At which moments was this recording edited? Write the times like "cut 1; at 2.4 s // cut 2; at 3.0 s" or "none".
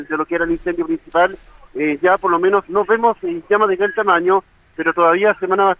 cut 1; at 2.6 s